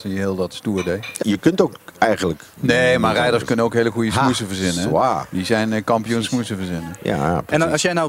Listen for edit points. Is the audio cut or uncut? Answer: cut